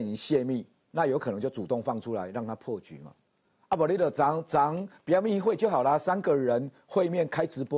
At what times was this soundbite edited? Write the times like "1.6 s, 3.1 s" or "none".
none